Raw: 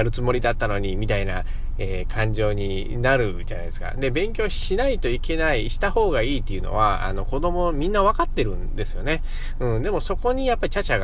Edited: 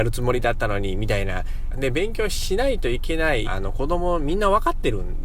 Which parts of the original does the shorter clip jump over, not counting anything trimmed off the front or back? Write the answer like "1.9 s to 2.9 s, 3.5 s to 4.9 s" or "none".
1.7 s to 3.9 s, 5.6 s to 7.0 s